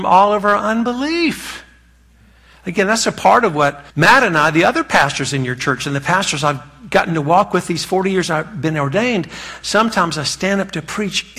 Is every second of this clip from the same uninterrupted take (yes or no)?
no